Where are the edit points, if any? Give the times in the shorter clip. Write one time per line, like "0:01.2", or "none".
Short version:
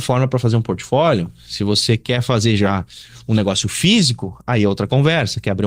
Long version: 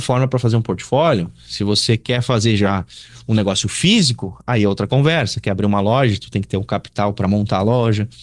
none